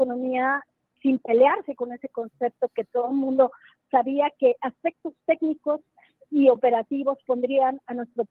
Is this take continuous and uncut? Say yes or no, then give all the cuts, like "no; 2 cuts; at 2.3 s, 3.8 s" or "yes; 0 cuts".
no; 1 cut; at 3.8 s